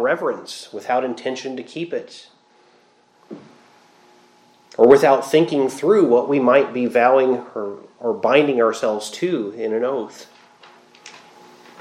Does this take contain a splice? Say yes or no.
no